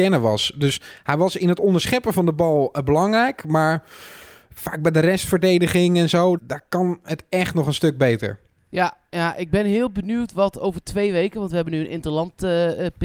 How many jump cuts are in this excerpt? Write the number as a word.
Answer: one